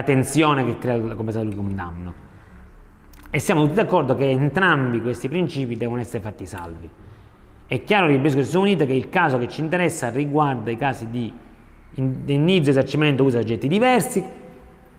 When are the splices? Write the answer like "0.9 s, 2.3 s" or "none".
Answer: none